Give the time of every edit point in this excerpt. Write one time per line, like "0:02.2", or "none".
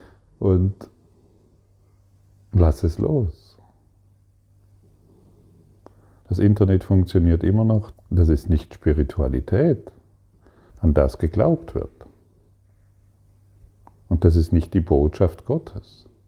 0:06.2
0:07.9
0:10.7